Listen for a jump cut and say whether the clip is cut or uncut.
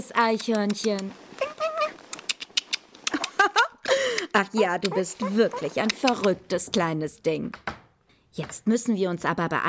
uncut